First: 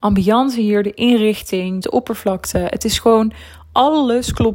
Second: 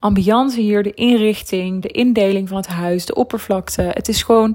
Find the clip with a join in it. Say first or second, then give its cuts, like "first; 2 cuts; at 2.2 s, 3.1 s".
first; 1 cut; at 1.8 s